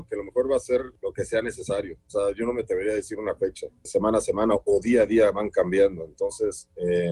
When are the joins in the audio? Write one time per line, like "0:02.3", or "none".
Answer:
0:03.9